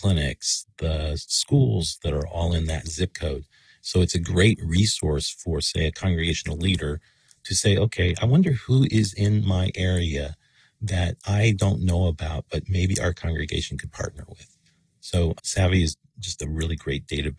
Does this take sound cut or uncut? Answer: uncut